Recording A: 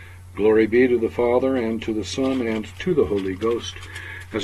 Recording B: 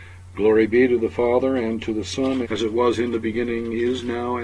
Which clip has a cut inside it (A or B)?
B